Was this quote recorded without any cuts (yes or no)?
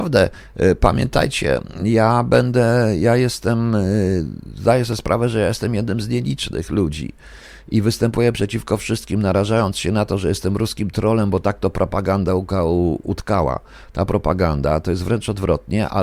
yes